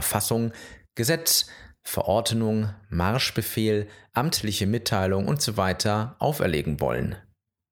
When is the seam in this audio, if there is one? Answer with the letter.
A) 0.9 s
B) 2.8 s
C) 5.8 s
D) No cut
D